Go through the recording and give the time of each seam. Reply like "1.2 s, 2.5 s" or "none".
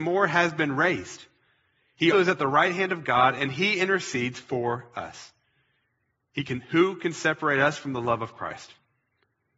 2.1 s